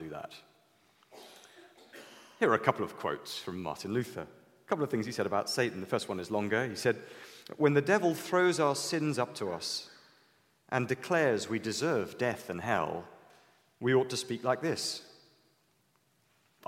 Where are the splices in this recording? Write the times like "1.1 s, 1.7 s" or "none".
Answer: none